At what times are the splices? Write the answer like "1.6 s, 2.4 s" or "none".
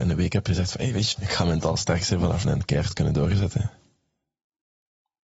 1.1 s, 2.4 s